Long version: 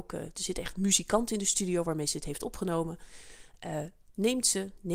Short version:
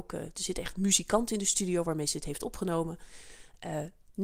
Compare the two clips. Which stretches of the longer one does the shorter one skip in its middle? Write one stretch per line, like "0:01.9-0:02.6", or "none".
none